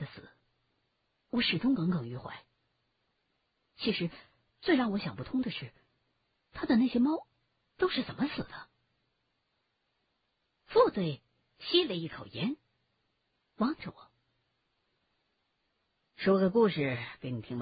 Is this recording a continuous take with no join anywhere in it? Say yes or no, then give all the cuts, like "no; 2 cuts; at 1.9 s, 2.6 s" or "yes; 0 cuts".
yes; 0 cuts